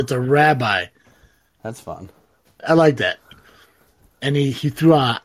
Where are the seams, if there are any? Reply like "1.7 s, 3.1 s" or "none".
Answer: 2.6 s

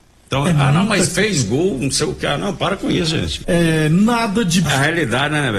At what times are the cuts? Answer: 3.4 s, 4.7 s

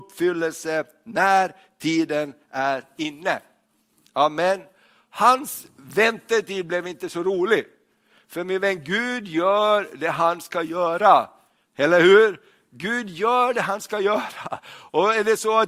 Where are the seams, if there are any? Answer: none

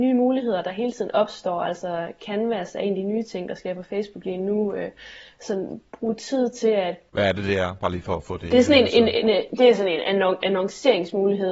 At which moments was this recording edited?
none

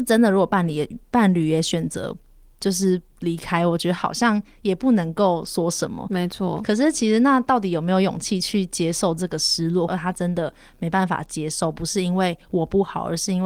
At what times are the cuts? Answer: 9.9 s

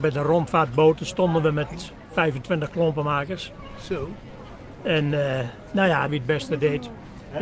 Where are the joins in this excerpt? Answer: 6.1 s

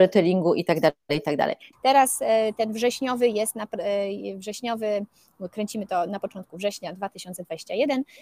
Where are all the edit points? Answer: 1.7 s

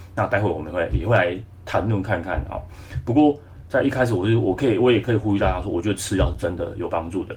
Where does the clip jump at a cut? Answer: none

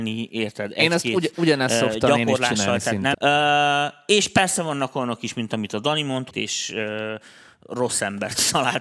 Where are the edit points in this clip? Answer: 3.1 s, 6.3 s

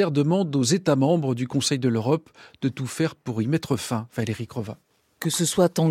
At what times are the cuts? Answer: none

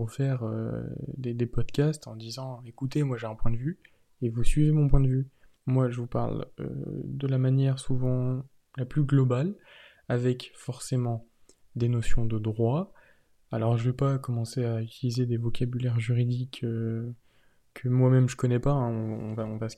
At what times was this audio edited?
5.6 s

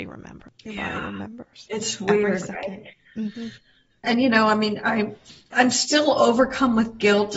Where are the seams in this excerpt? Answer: none

